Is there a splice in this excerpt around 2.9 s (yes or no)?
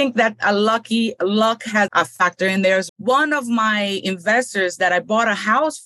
yes